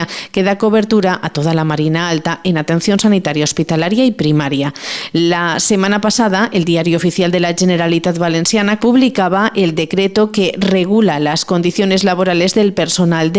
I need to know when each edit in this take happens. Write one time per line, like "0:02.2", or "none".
0:08.8